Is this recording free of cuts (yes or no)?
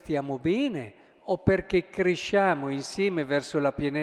yes